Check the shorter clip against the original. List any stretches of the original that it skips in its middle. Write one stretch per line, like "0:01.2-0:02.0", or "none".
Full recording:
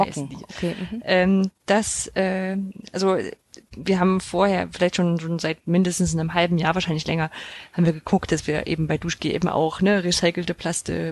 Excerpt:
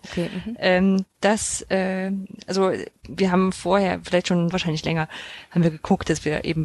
0:03.4-0:03.6
0:05.2-0:06.7